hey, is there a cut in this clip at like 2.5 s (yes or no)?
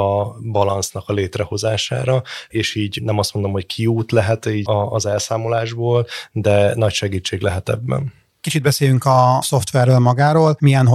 no